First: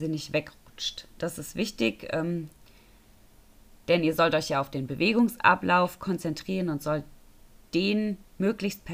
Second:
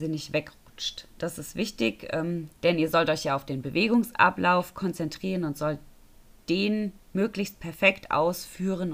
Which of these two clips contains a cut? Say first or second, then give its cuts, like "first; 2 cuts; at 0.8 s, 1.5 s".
second; 1 cut; at 2.6 s